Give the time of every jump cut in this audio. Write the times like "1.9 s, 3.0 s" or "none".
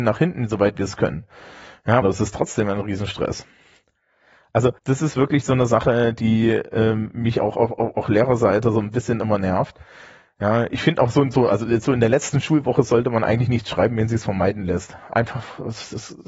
2.0 s, 4.8 s

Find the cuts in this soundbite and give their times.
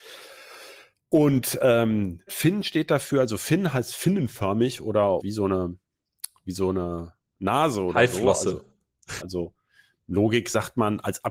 2.3 s, 5.2 s, 9.2 s

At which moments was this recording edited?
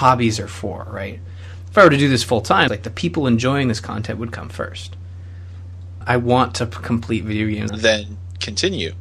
2.7 s, 6.0 s, 7.7 s

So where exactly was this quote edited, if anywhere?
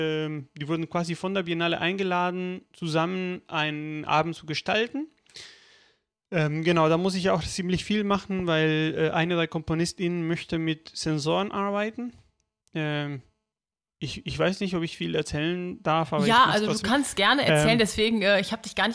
none

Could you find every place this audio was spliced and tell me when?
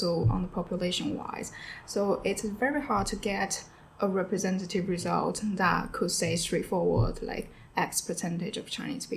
none

